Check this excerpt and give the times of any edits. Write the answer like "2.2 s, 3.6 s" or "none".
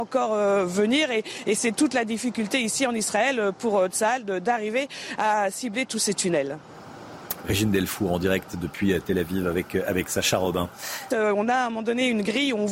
7.4 s, 11.1 s